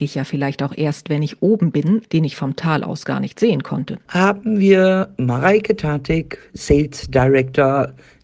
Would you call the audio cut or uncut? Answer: cut